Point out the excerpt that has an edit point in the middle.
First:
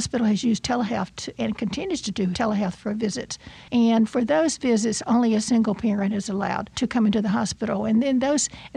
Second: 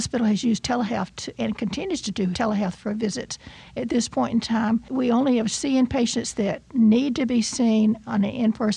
first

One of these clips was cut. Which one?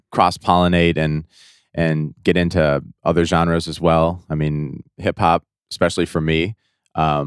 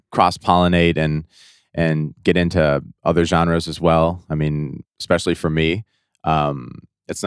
second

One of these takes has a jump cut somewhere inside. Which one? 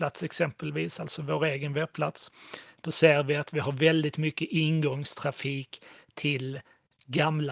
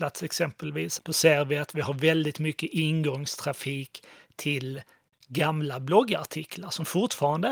second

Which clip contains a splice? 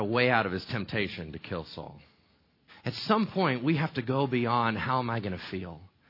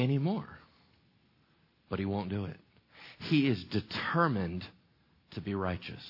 first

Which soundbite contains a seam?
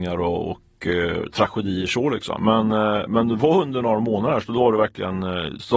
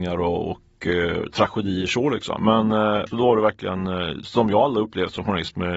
second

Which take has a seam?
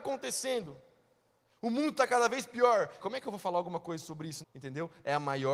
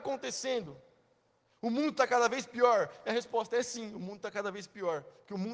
first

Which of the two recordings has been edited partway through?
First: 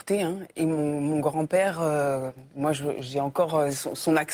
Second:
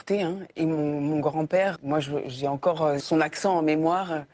second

